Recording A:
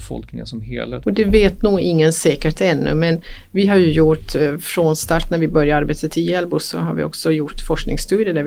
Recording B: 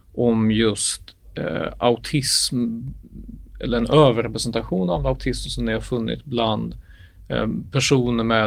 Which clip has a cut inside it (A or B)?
A